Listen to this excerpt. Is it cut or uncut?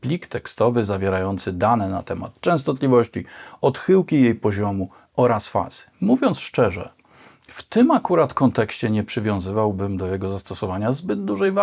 uncut